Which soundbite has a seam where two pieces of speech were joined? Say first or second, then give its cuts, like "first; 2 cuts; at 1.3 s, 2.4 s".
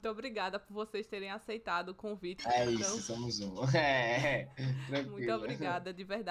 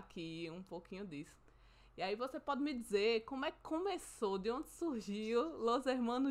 first; 1 cut; at 2.4 s